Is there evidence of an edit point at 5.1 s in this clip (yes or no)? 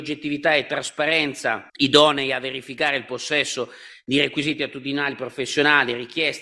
no